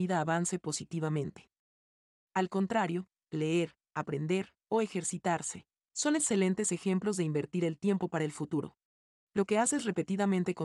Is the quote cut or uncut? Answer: cut